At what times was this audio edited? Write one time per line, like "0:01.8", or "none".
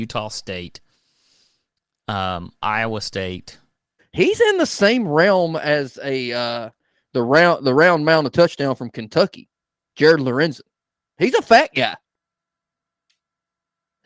0:04.0